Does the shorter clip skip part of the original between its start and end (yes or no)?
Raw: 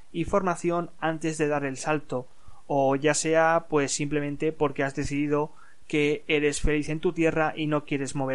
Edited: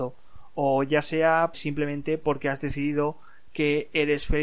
yes